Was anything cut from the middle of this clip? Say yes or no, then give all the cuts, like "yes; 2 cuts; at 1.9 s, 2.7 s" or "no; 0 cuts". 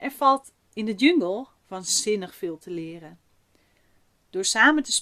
no; 0 cuts